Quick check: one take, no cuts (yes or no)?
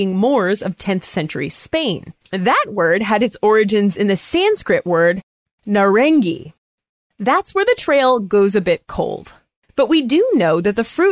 no